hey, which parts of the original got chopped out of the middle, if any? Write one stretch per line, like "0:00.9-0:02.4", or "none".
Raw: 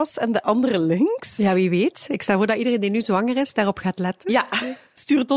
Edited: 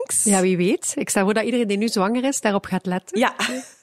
none